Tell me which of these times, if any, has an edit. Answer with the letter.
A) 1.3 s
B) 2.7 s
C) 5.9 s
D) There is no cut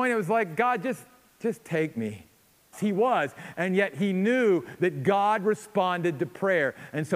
B